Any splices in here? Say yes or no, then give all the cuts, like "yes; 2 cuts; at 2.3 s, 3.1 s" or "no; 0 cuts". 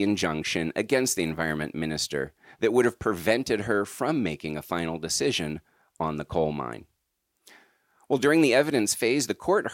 no; 0 cuts